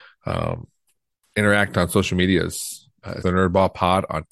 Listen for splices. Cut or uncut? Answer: cut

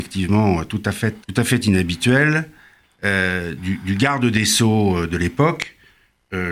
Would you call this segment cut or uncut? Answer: cut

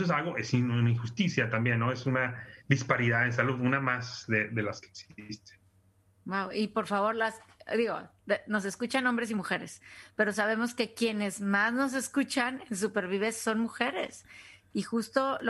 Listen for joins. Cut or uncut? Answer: uncut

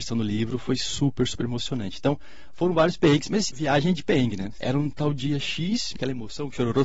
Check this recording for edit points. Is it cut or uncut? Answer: cut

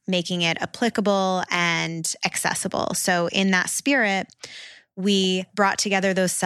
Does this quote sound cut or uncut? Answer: uncut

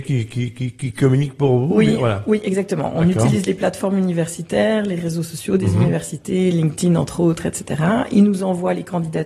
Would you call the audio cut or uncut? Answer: uncut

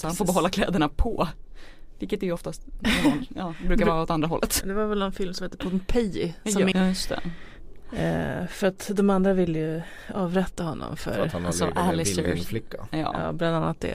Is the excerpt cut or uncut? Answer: cut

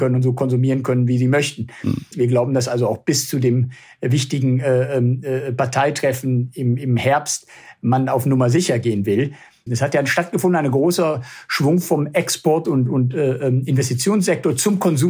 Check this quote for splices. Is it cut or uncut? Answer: cut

